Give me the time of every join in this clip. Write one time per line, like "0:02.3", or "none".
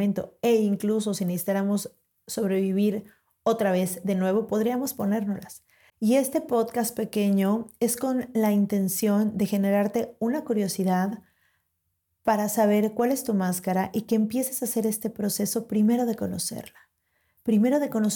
0:05.9